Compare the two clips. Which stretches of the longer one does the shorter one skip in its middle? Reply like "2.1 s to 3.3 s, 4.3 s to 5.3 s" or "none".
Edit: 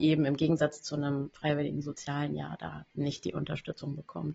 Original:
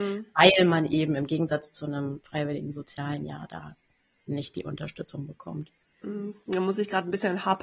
3.8 s to 4.2 s